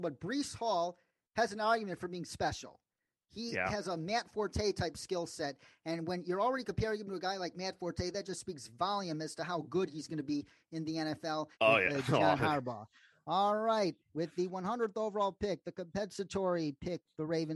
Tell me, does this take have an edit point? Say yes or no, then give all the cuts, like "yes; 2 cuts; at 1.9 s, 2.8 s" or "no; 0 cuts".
yes; 1 cut; at 11.5 s